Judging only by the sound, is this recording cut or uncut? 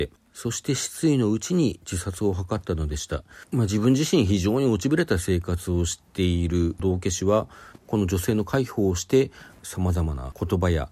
cut